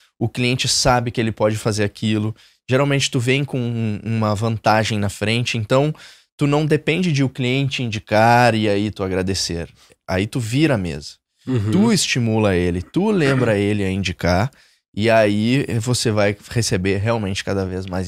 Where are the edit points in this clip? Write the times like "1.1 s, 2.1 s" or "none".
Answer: none

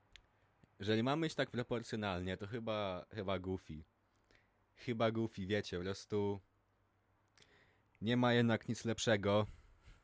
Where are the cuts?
none

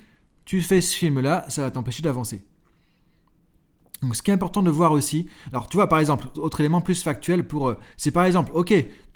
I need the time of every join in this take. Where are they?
6.3 s, 7.9 s

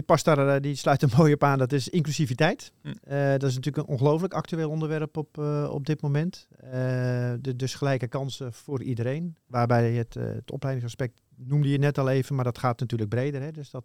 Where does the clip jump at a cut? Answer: 9.5 s

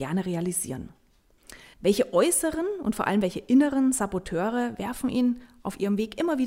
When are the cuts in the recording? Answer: 1.7 s

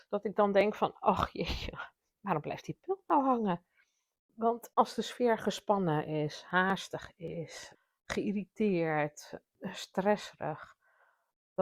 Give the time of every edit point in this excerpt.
4.2 s

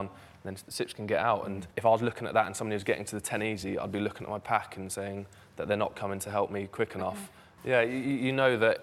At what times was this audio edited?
1.7 s, 7.6 s

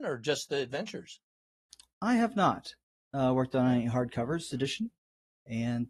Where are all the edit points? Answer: 4.5 s

